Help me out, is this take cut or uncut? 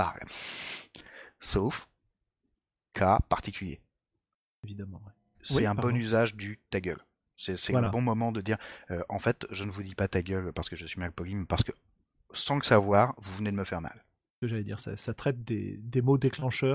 cut